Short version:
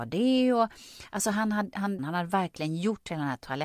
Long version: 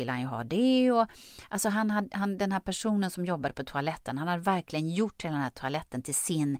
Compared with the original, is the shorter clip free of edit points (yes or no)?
no